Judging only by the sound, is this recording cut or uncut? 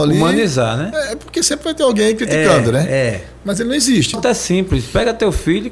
cut